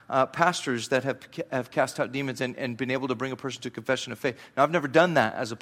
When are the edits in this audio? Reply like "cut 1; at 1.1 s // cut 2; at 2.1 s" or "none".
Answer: none